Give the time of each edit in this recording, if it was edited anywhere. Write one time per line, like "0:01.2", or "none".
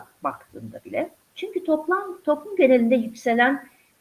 0:01.3

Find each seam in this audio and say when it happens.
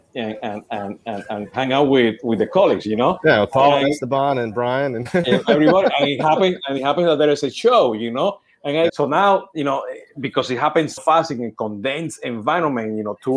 0:08.9
0:11.0

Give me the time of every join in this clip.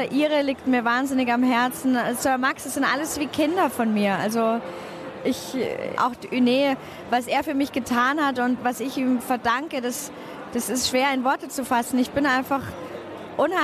0:05.9

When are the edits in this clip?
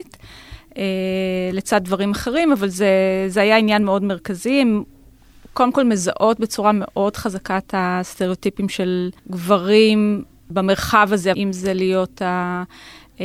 0:09.2
0:11.3

